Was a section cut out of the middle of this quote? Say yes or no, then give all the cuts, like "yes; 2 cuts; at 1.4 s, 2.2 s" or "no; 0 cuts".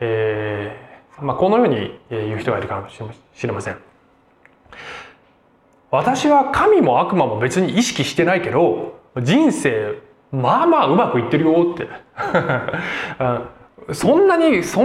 yes; 2 cuts; at 1.2 s, 9.1 s